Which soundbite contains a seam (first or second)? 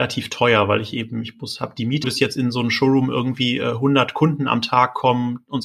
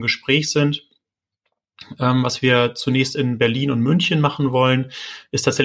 first